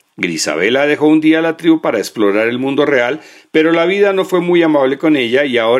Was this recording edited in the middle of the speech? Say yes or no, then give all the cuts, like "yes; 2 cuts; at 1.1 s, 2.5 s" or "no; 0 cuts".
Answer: no; 0 cuts